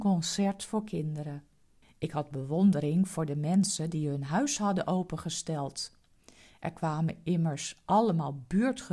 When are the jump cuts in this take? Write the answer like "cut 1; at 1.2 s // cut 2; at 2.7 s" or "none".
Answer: cut 1; at 1.8 s